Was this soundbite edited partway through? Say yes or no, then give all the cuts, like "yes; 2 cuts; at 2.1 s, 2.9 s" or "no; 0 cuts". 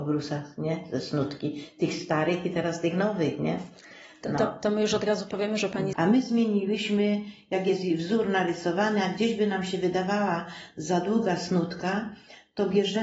yes; 1 cut; at 5.9 s